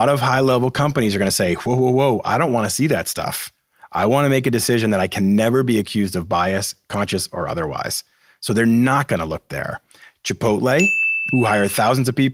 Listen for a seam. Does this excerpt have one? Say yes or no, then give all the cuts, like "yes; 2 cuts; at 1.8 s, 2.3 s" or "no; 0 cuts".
yes; 1 cut; at 11.3 s